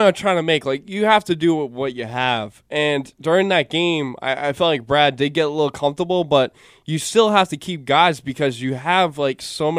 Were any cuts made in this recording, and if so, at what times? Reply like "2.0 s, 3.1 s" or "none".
none